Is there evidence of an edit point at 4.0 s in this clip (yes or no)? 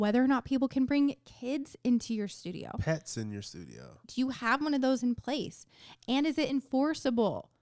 yes